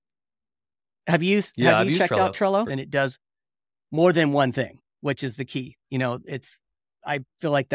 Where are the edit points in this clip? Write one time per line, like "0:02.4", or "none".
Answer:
0:02.7

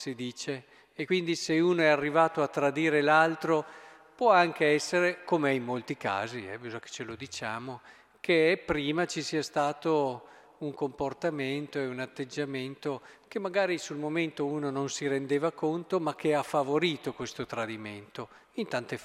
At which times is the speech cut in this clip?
none

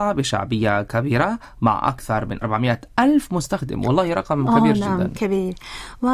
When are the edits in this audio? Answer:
0:02.4

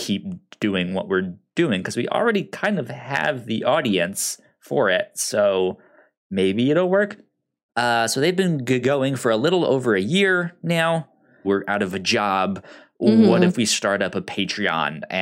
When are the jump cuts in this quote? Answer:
0:07.7
0:11.4

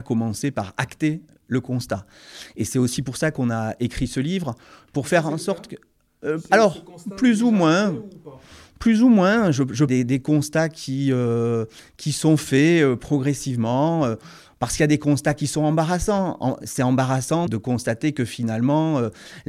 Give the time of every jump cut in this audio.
0:09.9
0:17.5

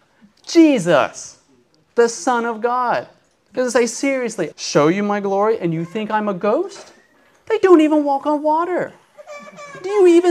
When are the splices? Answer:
0:04.5

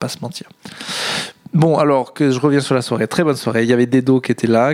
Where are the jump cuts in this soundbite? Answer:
none

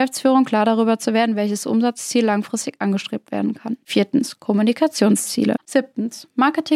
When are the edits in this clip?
0:05.6

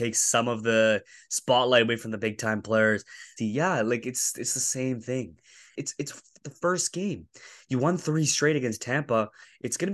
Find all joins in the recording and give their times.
0:03.4
0:05.7

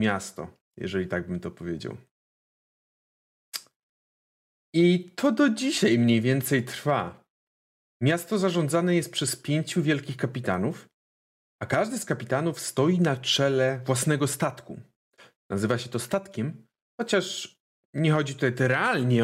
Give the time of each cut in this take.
none

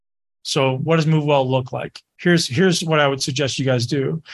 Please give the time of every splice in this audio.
none

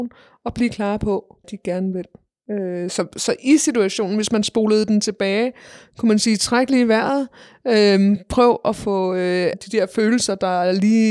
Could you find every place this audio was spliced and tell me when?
0:01.4
0:09.5

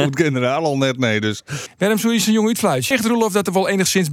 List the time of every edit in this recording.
0:01.7
0:02.9

